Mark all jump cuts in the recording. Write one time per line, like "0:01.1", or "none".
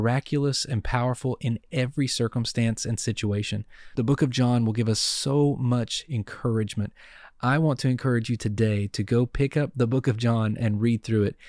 none